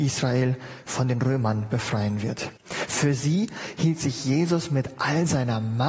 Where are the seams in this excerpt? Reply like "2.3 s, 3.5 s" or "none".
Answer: 2.6 s